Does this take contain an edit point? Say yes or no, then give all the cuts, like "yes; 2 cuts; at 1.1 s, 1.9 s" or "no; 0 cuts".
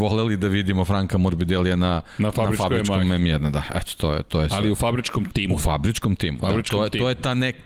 no; 0 cuts